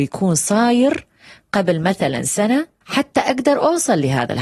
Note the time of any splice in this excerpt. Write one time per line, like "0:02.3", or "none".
0:02.8